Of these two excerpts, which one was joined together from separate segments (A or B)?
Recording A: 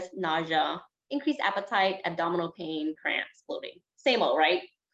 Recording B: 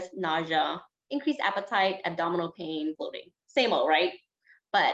B